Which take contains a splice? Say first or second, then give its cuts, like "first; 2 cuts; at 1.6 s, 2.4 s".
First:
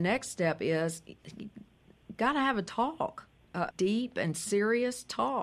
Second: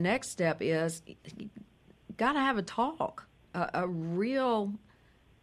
first; 1 cut; at 3.7 s